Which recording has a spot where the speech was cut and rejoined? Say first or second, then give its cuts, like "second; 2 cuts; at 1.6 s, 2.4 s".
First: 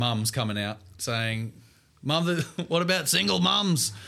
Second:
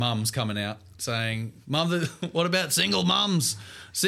second; 1 cut; at 1.6 s